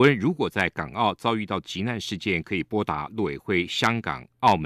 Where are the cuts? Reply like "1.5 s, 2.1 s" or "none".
none